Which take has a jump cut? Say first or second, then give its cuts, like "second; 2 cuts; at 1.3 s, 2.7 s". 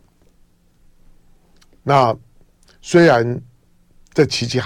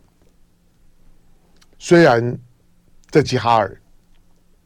second; 2 cuts; at 1.7 s, 3.2 s